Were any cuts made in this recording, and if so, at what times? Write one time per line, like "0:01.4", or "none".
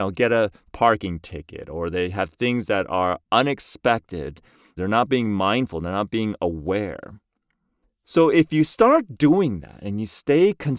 0:04.8
0:07.8